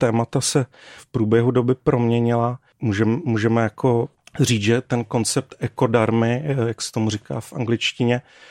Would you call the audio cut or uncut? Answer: cut